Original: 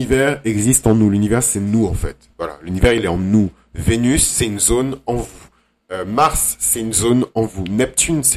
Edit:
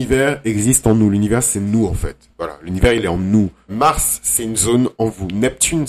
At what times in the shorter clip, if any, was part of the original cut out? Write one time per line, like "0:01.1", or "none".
0:03.7